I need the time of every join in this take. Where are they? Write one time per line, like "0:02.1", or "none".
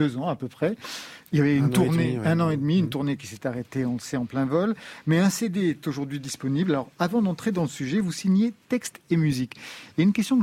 none